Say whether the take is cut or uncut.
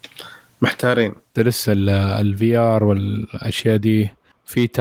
cut